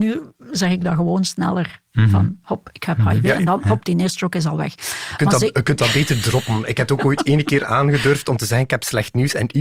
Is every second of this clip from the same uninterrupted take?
yes; 0 cuts

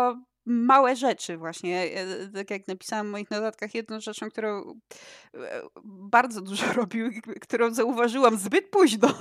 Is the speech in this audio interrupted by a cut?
no; 0 cuts

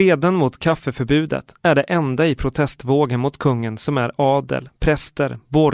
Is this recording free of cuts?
yes; 0 cuts

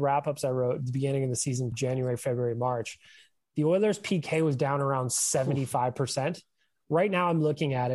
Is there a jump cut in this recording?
yes; 1 cut; at 1.7 s

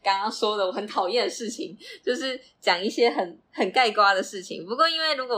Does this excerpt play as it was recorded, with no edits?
yes; 0 cuts

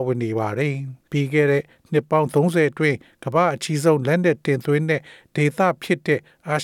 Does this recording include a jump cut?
yes; 1 cut; at 1.0 s

